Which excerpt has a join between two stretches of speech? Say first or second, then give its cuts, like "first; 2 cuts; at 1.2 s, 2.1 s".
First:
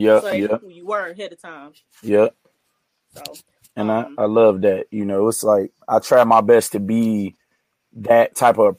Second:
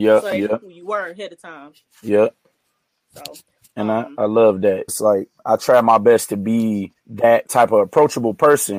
second; 2 cuts; at 4.9 s, 7.0 s